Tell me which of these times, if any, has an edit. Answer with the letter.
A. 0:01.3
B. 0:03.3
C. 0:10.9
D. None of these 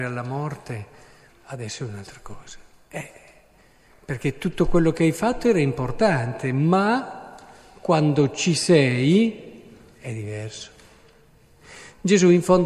A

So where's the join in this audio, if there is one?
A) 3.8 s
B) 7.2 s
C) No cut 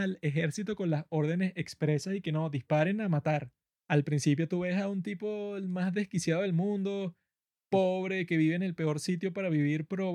A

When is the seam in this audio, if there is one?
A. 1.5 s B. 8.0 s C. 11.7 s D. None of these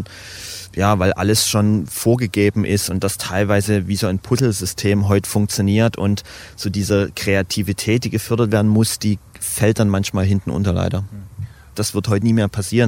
C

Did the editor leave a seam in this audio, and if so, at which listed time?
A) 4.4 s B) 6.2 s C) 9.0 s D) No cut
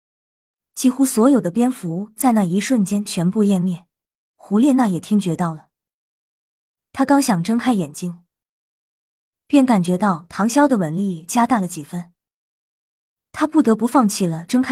A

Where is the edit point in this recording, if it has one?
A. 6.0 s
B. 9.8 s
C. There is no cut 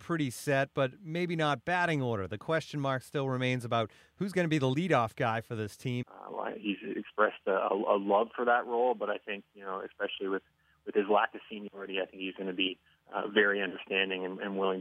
A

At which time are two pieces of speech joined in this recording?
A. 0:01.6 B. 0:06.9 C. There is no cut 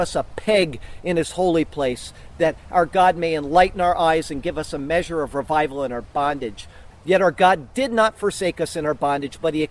B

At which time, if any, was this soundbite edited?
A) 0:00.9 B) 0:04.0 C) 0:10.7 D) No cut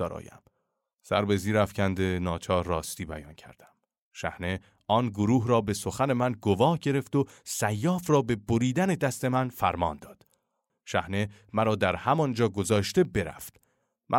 C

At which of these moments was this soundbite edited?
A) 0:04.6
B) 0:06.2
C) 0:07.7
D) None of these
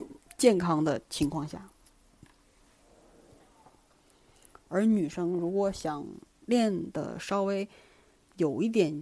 A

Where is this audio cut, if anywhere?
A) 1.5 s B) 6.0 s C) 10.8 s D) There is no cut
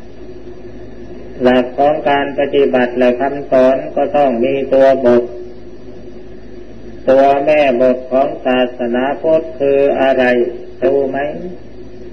C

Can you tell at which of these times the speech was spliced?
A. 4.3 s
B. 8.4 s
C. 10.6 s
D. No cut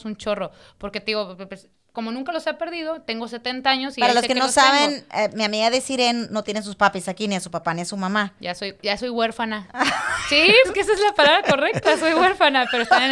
C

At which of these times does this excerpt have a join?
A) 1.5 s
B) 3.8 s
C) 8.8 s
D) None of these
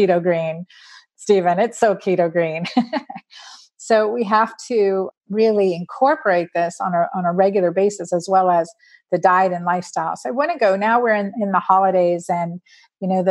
D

